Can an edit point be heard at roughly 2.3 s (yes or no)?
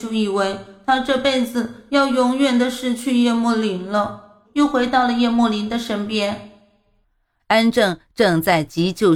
no